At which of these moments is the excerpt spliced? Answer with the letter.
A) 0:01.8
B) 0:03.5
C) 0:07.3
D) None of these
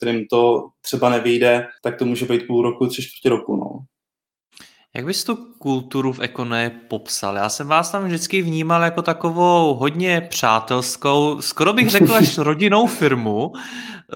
A